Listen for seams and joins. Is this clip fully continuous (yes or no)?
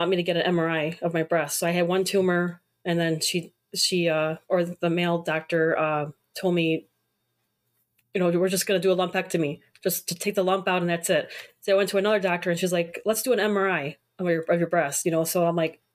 yes